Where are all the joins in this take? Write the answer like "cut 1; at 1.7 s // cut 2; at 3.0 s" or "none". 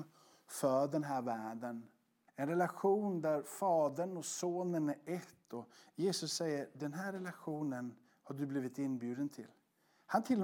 cut 1; at 2.3 s